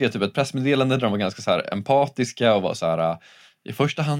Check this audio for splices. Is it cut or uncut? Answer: uncut